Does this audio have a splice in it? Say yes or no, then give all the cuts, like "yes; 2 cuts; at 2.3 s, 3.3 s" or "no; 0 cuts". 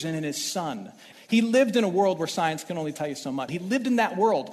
yes; 2 cuts; at 1.1 s, 3.5 s